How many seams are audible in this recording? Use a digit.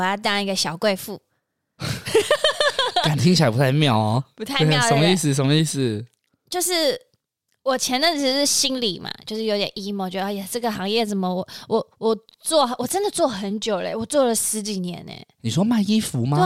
0